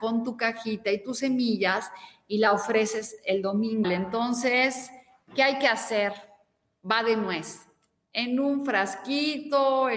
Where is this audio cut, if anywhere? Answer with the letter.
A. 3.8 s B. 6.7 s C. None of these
A